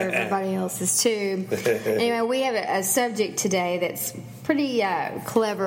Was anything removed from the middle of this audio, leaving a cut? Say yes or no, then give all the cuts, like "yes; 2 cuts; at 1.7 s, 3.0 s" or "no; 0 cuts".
no; 0 cuts